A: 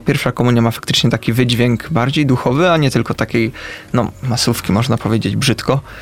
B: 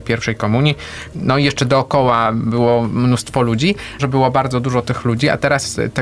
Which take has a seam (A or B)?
B